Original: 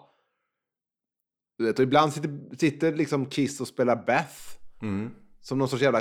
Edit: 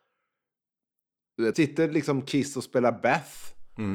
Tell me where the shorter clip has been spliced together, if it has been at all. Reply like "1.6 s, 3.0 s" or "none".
1.5 s